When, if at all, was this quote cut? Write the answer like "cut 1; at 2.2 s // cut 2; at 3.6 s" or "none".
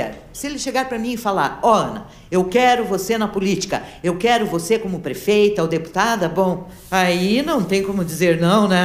none